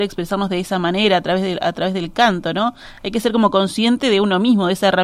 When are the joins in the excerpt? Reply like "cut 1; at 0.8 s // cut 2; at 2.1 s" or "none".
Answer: none